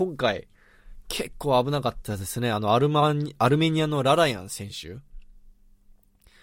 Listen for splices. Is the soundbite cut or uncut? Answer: uncut